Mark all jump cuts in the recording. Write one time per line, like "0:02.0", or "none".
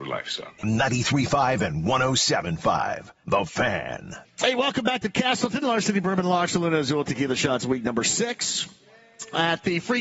none